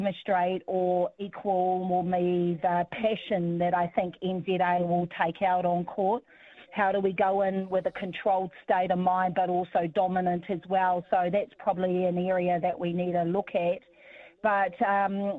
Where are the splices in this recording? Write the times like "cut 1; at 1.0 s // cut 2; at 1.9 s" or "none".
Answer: none